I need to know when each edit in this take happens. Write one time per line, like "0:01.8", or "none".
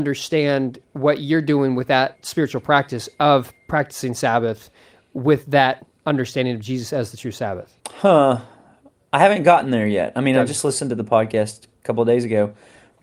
0:07.8